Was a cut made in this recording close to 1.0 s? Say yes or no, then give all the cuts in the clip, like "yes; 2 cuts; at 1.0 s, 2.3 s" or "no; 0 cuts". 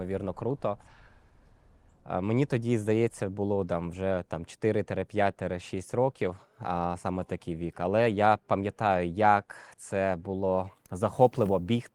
no; 0 cuts